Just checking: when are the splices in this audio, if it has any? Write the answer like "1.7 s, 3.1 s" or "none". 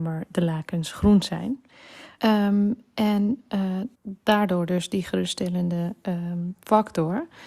2.2 s, 3.9 s